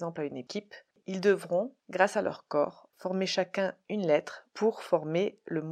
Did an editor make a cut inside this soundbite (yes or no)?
yes